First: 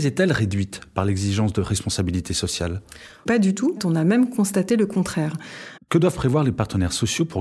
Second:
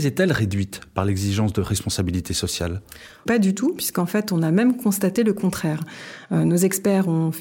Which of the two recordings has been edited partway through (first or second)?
first